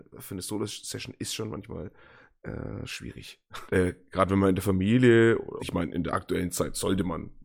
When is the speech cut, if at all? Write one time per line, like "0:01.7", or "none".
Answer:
0:03.7
0:05.6